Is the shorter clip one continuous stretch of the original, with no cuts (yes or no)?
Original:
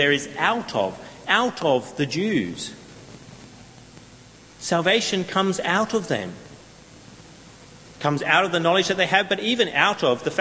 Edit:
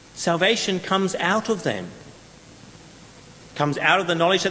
yes